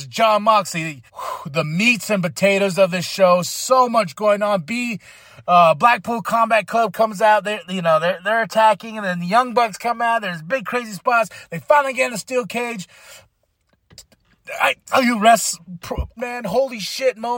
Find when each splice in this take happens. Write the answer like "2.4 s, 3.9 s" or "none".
1.1 s, 14.9 s, 16.2 s